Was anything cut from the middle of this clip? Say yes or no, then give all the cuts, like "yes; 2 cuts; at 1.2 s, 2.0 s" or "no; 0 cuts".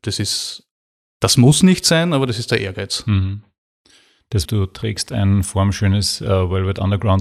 yes; 1 cut; at 4.4 s